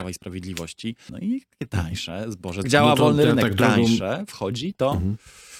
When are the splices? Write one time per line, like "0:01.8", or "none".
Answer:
0:01.1
0:02.6